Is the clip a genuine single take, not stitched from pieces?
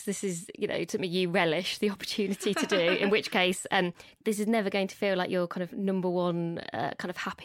no; 1 cut; at 4.2 s

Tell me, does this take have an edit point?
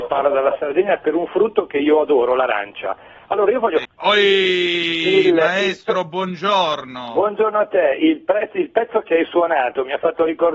yes; 1 cut; at 3.8 s

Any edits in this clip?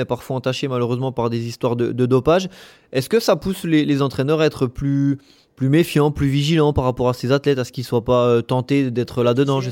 no; 0 cuts

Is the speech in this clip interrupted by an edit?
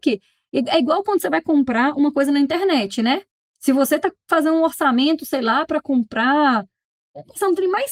no; 0 cuts

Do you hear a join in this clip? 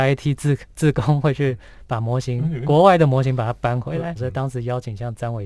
yes; 1 cut; at 4.2 s

